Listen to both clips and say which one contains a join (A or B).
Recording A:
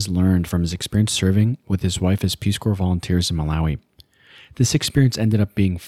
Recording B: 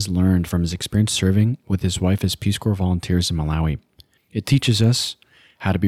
B